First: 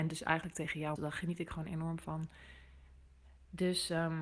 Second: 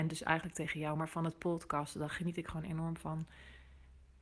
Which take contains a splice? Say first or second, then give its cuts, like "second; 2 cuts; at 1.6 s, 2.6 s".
first; 1 cut; at 1.0 s